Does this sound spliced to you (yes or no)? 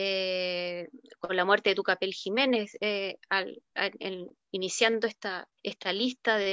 yes